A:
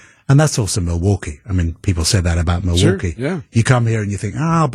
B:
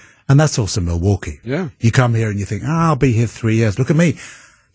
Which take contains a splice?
B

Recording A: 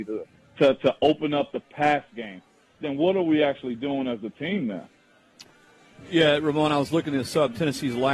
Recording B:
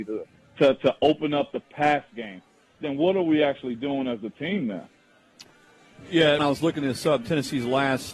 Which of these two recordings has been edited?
B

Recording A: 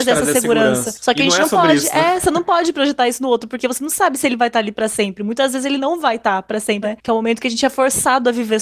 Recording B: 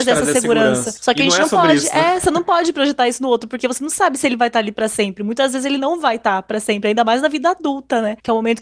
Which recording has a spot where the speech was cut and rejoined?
A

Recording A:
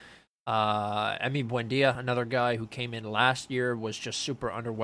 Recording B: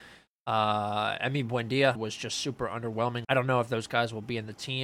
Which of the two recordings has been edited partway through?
B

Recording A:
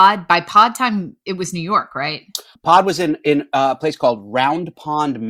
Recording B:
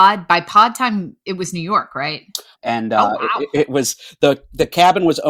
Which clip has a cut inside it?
B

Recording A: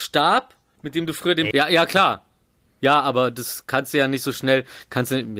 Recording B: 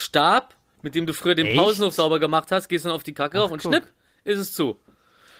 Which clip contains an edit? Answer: A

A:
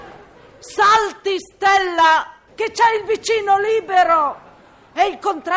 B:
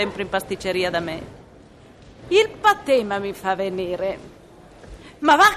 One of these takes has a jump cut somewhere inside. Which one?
A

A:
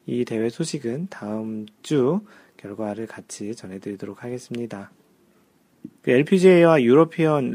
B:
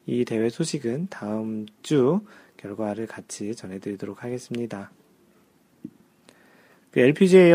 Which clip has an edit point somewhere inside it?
A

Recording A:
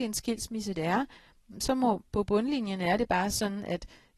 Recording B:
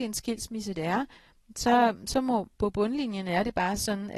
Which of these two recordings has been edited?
A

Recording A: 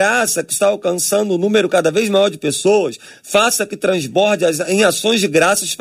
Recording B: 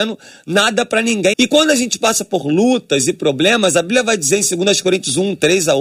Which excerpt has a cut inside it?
B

